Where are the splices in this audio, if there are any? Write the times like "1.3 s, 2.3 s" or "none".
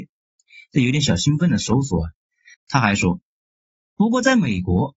2.5 s